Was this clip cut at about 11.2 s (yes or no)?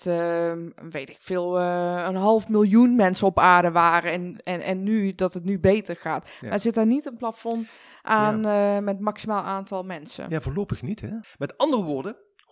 yes